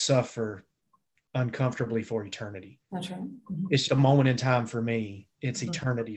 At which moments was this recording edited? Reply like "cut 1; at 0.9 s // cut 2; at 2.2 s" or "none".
cut 1; at 3.9 s

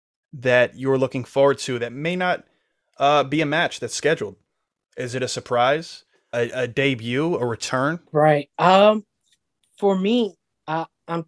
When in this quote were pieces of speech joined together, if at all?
cut 1; at 6.3 s // cut 2; at 8.1 s

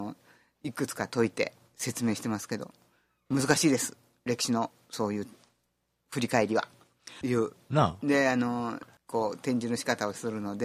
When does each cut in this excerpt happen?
cut 1; at 7.2 s // cut 2; at 9.0 s

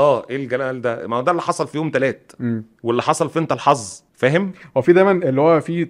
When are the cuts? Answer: cut 1; at 4.1 s

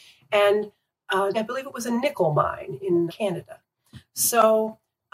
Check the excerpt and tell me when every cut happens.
cut 1; at 1.3 s // cut 2; at 3.1 s

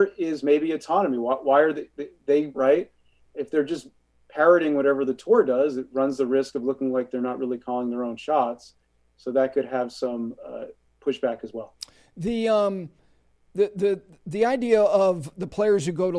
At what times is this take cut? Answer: cut 1; at 2.5 s

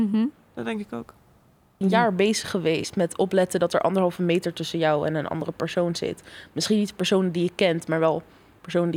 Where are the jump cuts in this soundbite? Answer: cut 1; at 1.8 s

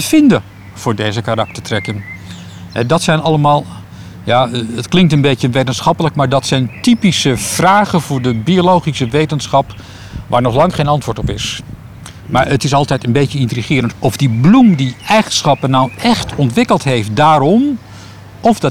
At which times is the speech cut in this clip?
cut 1; at 13.9 s

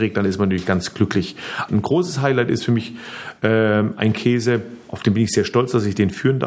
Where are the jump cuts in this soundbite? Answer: cut 1; at 1.7 s

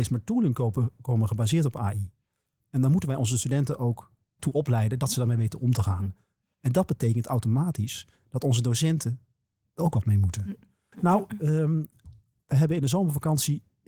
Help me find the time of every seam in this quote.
cut 1; at 10.9 s

